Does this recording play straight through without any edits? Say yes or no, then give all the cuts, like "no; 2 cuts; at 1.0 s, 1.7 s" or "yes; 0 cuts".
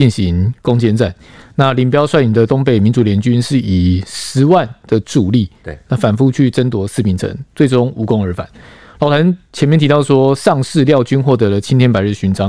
yes; 0 cuts